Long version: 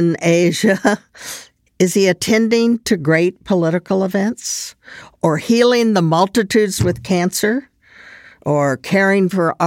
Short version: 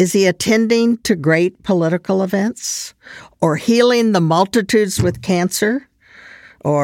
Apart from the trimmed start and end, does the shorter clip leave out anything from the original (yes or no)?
no